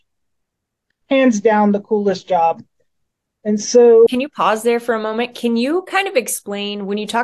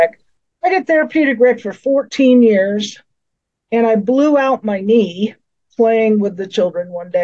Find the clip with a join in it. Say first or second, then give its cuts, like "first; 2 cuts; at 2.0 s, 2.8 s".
first; 1 cut; at 4.1 s